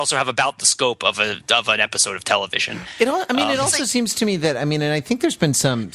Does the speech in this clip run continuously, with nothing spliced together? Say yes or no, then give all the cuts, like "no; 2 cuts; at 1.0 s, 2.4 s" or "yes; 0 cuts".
yes; 0 cuts